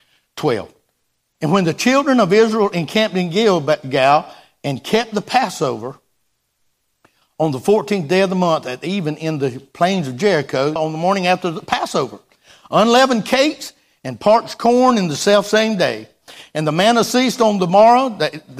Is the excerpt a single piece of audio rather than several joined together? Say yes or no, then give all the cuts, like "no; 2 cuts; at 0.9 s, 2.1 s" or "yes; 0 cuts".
no; 1 cut; at 10.8 s